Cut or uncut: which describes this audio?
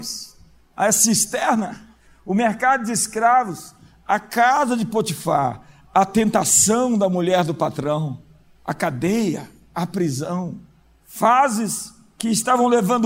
cut